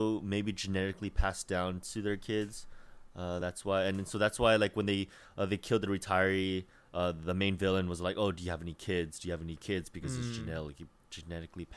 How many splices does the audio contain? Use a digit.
0